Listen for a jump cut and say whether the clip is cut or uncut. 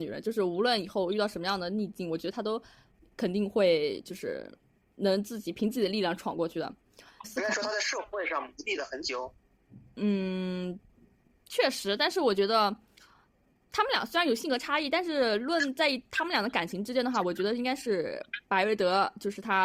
cut